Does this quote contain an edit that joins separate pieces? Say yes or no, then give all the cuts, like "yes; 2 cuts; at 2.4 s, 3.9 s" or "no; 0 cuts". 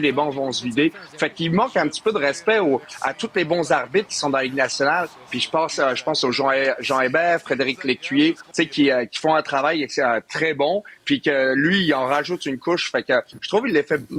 yes; 1 cut; at 8.5 s